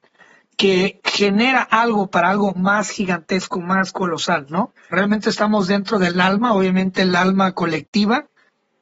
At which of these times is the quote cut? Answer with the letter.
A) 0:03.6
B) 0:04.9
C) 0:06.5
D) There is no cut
B